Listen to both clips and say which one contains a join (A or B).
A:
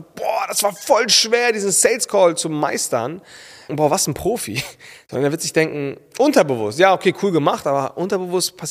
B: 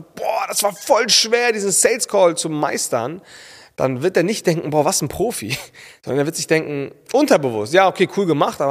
A